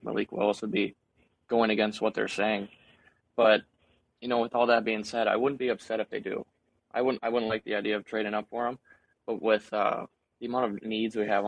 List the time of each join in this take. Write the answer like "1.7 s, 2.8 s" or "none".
none